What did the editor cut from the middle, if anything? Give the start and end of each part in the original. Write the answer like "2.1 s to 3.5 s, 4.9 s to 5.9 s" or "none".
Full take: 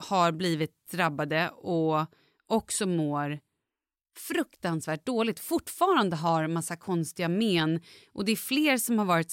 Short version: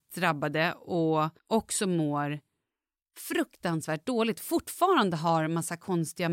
2.2 s to 2.4 s